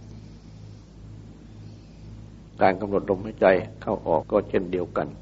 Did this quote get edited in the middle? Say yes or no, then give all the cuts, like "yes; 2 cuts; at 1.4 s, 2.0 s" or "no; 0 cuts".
yes; 1 cut; at 4.2 s